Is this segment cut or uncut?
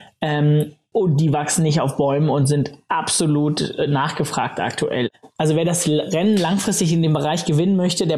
cut